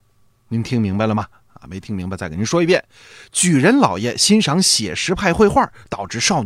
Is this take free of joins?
yes; 0 cuts

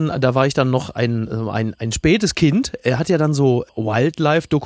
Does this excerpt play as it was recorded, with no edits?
yes; 0 cuts

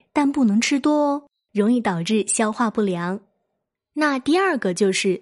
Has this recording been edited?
no; 0 cuts

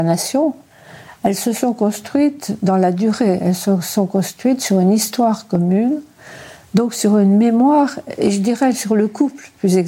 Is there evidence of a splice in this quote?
no; 0 cuts

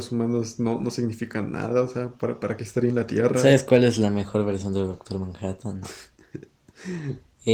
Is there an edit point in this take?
no; 0 cuts

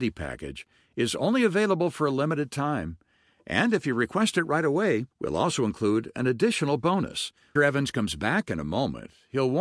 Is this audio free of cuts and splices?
no; 2 cuts; at 5.1 s, 7.6 s

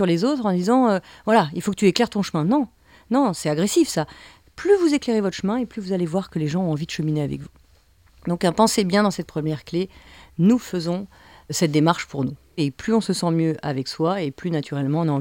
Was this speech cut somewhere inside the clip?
no; 0 cuts

